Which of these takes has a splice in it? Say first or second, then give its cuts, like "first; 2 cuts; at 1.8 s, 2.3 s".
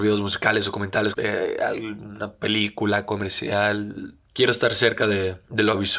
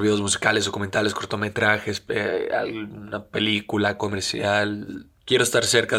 first; 1 cut; at 1.1 s